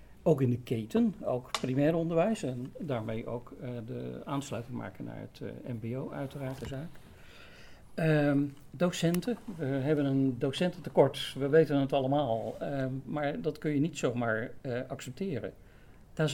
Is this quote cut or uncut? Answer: uncut